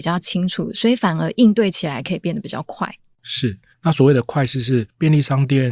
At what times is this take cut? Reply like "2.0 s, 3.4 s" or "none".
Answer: 3.7 s